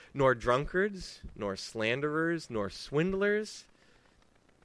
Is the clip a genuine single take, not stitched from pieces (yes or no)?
yes